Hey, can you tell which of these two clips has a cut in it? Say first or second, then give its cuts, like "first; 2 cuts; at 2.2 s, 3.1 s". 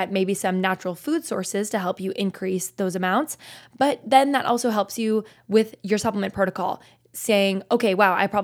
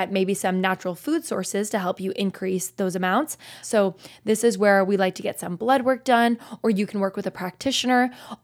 second; 1 cut; at 3.6 s